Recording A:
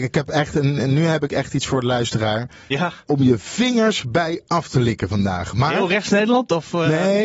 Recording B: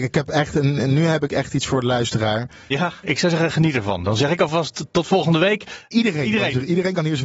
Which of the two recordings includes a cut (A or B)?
B